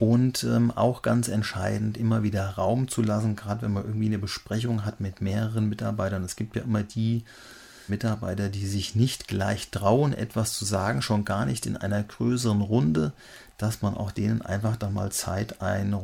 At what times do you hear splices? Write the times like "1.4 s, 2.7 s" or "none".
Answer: 7.9 s